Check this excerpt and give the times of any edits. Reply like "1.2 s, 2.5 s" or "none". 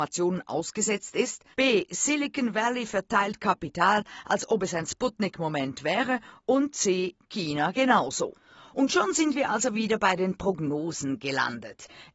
1.5 s

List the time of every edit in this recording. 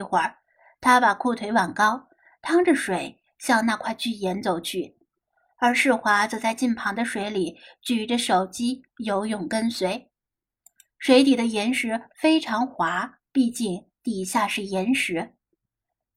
13.2 s

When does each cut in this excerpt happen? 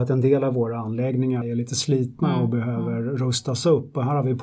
1.4 s

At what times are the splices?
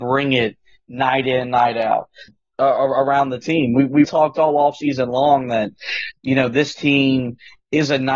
2.3 s, 4.1 s

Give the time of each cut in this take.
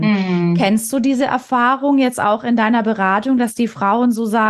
none

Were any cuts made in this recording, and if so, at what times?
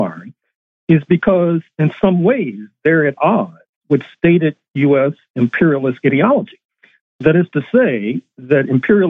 none

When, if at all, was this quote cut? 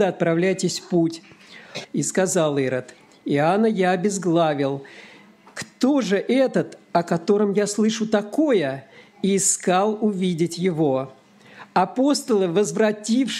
1.8 s

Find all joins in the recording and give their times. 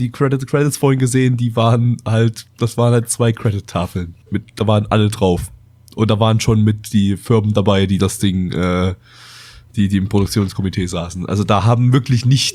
4.2 s

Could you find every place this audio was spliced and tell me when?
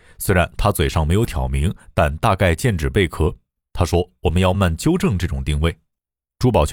4.5 s

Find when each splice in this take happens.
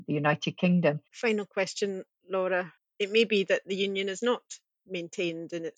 1.0 s

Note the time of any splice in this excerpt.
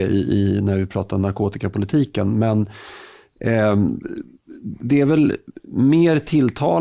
5.6 s

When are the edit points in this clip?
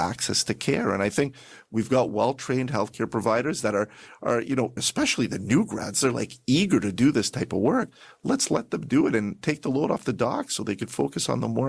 4.8 s

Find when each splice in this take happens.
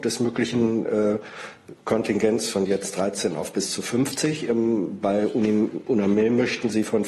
none

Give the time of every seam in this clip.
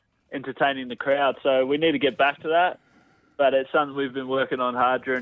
none

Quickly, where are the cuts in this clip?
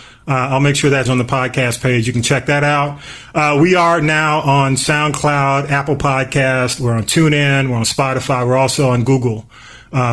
1.1 s

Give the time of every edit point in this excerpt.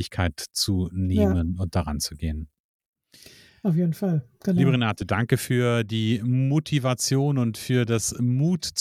none

